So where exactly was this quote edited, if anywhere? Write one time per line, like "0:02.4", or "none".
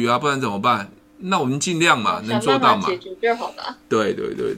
none